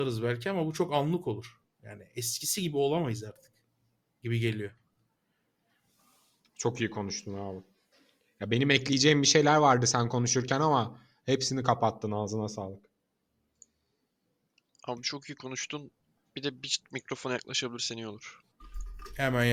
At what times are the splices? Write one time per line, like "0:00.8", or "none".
none